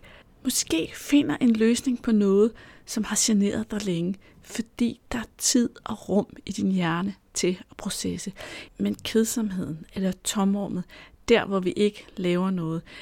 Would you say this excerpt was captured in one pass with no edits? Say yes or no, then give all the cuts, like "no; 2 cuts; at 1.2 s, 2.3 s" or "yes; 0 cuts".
no; 1 cut; at 8.7 s